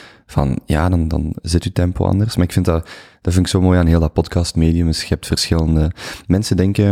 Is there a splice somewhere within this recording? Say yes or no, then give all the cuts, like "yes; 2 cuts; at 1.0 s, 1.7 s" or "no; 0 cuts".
no; 0 cuts